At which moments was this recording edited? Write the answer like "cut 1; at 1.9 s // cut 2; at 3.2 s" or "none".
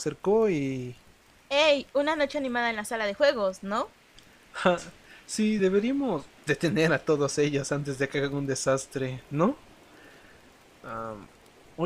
none